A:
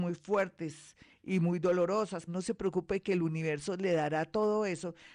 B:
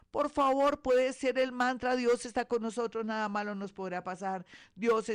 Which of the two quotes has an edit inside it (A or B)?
A